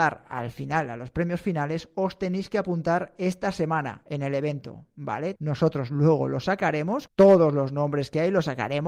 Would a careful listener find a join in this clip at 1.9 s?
no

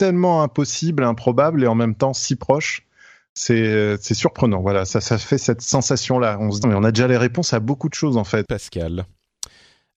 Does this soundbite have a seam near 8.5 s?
yes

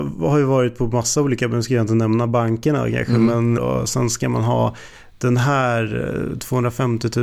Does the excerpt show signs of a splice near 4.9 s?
no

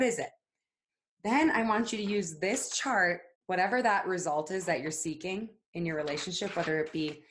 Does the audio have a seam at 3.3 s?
yes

